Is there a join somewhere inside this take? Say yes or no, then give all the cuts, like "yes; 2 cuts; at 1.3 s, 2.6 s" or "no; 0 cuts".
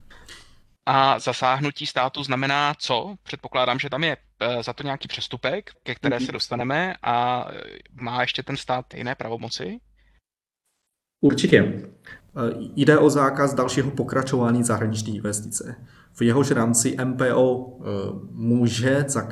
yes; 2 cuts; at 5.7 s, 8.9 s